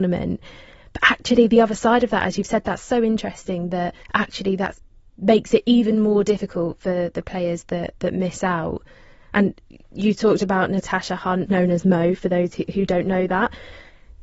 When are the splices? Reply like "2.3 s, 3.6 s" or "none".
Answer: 4.0 s, 11.5 s